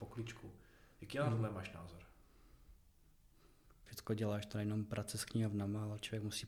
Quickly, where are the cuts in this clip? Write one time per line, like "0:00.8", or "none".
0:03.9